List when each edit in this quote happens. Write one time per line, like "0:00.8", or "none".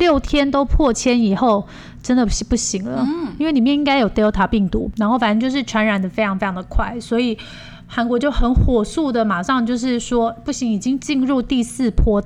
none